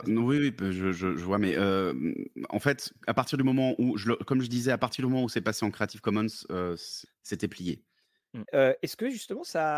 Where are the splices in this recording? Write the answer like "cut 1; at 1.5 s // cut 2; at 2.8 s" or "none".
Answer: cut 1; at 7.1 s // cut 2; at 8.4 s